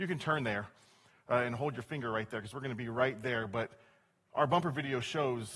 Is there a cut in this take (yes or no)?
no